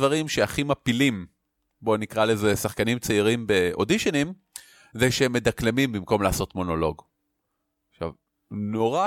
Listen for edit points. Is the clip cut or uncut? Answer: uncut